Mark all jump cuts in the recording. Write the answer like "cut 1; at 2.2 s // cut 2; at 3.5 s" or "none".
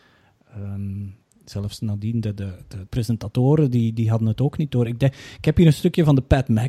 cut 1; at 2.9 s